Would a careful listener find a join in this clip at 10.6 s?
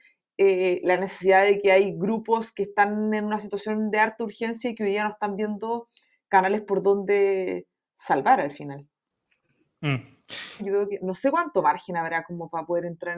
yes; 1 cut; at 10.6 s

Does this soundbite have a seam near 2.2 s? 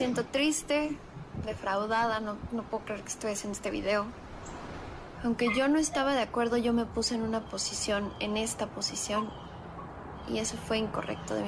no; 1 cut; at 5.1 s

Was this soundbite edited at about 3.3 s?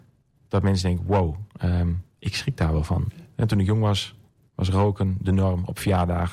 yes; 1 cut; at 3.3 s

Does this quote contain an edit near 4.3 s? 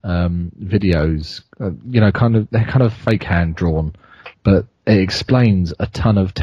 yes; 1 cut; at 4.3 s

